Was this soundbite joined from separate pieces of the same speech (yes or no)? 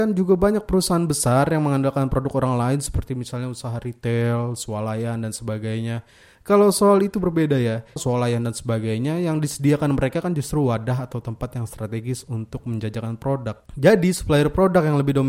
yes